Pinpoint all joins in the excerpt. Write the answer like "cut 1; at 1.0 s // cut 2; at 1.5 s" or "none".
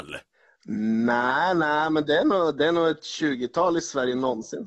none